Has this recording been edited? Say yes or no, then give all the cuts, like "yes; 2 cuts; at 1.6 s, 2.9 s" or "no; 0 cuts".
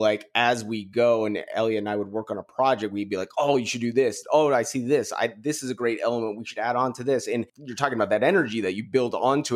no; 0 cuts